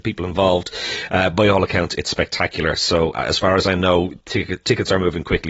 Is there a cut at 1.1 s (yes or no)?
no